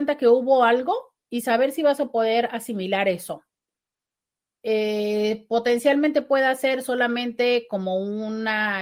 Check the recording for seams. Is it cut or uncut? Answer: uncut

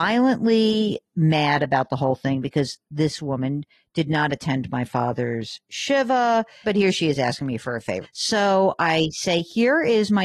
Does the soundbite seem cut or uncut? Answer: cut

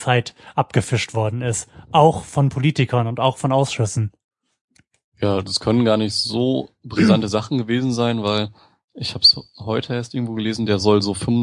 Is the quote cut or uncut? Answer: uncut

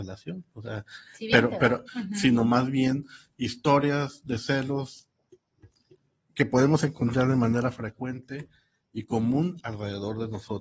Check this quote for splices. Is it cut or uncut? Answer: cut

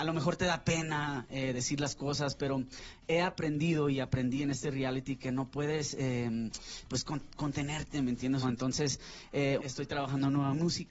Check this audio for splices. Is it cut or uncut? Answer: cut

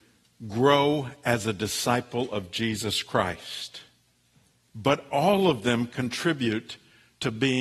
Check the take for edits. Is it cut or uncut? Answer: cut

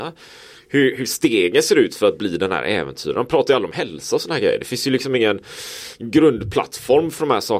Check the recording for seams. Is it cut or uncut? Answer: uncut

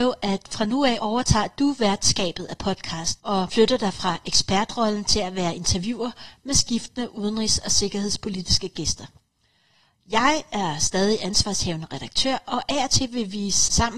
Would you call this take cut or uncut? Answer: uncut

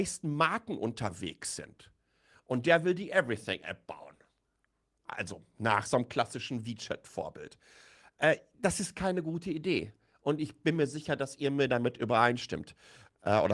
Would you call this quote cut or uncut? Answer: uncut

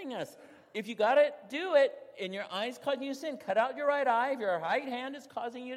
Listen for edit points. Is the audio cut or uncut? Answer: uncut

